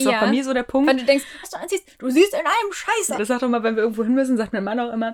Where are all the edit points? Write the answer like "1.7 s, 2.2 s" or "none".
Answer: 1.4 s, 3.2 s